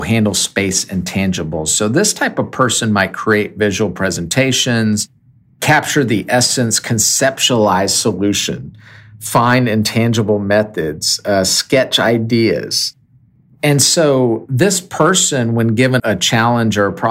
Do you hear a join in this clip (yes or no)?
yes